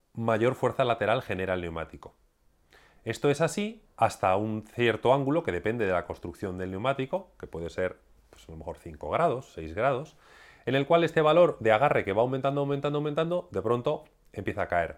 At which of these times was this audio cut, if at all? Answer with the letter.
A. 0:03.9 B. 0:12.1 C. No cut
A